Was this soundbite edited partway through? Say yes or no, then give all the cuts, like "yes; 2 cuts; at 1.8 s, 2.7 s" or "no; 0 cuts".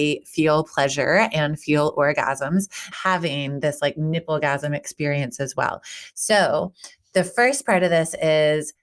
yes; 1 cut; at 2.9 s